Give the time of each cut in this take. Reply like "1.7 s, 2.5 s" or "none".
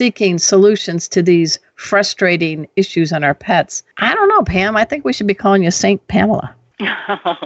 none